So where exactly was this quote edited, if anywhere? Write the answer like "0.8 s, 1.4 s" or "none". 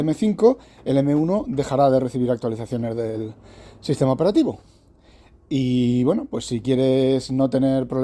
none